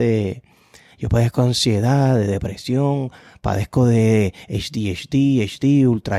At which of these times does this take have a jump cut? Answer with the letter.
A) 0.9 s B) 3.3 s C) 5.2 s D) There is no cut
D